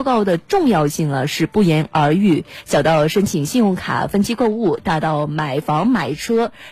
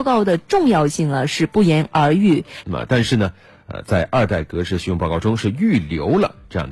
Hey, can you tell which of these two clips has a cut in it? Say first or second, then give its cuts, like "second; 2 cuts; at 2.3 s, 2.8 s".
second; 1 cut; at 2.6 s